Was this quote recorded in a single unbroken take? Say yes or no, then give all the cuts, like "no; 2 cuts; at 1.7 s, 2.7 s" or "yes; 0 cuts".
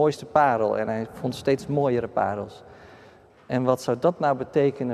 no; 1 cut; at 3.3 s